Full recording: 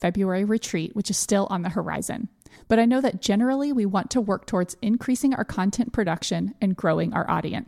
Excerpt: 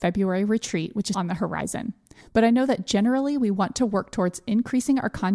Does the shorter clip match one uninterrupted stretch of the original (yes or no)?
no